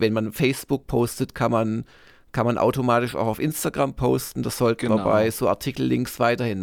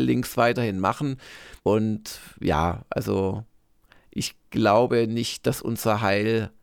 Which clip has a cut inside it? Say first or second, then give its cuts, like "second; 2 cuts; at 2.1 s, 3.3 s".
second; 1 cut; at 1.6 s